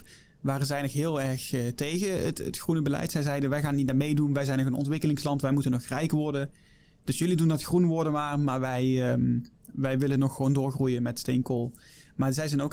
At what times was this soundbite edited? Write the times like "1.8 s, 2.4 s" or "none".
none